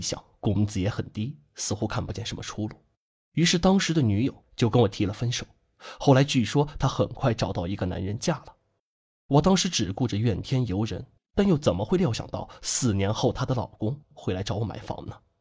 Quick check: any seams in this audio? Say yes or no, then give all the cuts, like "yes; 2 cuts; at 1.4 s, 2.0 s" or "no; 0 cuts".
yes; 1 cut; at 11.2 s